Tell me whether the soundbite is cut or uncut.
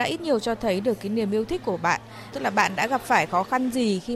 cut